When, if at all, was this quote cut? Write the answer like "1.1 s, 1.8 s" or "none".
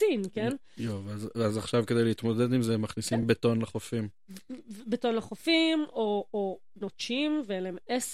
none